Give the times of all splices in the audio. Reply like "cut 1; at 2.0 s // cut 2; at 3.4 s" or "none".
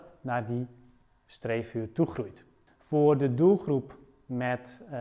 cut 1; at 2.7 s

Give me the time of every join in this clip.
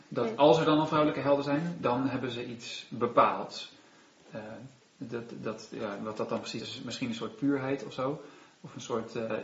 cut 1; at 6.6 s

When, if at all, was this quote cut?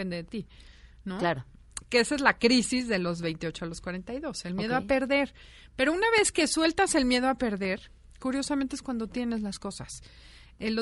none

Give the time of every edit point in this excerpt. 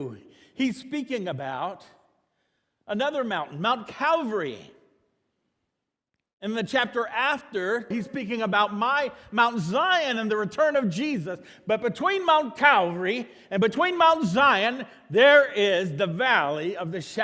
cut 1; at 7.9 s

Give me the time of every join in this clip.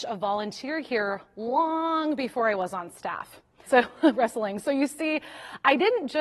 cut 1; at 3.7 s

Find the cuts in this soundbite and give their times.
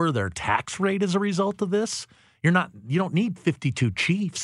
none

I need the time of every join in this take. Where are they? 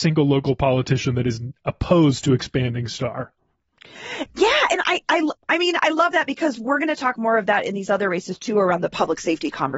cut 1; at 5.4 s

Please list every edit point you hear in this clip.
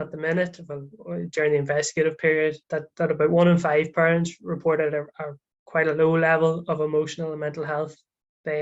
cut 1; at 2.6 s

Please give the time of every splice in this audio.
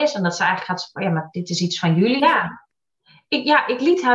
cut 1; at 2.2 s

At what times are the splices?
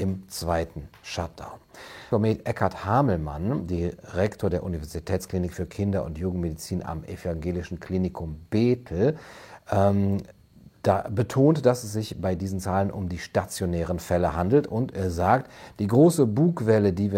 cut 1; at 2.1 s

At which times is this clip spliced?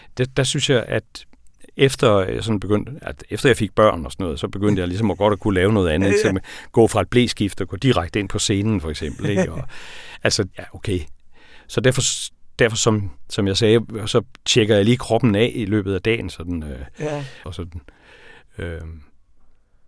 cut 1; at 10.5 s // cut 2; at 17.4 s

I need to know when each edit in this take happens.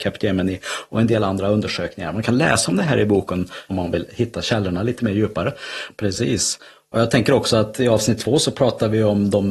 cut 1; at 3.7 s // cut 2; at 5.9 s

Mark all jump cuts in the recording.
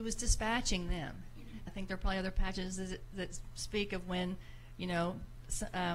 cut 1; at 1.7 s

